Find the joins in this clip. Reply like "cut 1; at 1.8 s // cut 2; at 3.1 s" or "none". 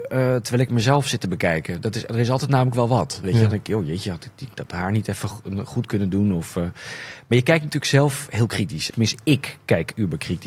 cut 1; at 8.9 s